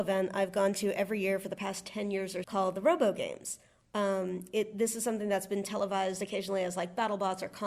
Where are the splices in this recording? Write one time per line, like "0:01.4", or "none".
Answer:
0:02.4